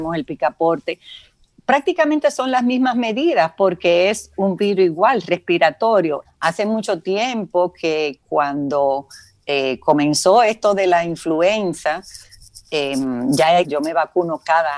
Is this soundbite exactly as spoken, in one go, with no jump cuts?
no; 2 cuts; at 6.2 s, 13.6 s

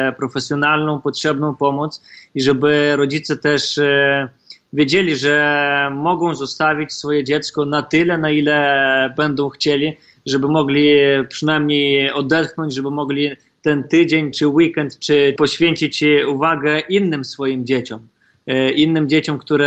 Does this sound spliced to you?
yes; 2 cuts; at 14.3 s, 15.4 s

